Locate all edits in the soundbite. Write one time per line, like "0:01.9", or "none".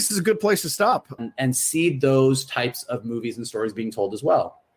0:01.2